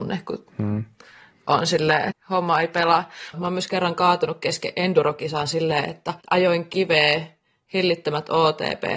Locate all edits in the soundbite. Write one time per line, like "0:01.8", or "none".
0:02.1
0:03.3
0:06.2